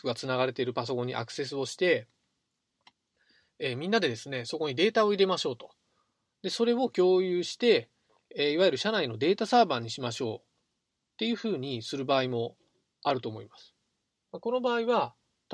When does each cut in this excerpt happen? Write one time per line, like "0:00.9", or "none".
none